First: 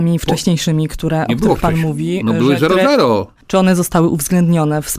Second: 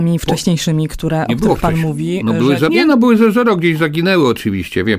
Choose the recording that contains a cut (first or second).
second